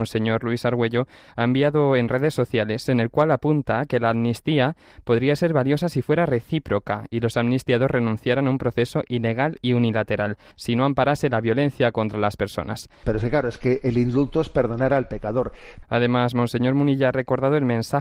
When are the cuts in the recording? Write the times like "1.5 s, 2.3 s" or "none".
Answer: 10.5 s, 13.0 s, 15.8 s